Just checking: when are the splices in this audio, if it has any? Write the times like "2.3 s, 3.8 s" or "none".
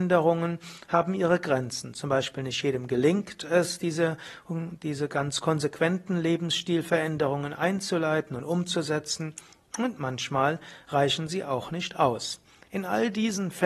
none